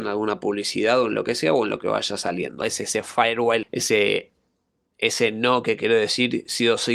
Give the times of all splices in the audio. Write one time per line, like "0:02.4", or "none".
0:02.6
0:03.6